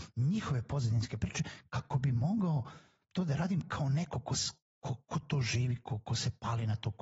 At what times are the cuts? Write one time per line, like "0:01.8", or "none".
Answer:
none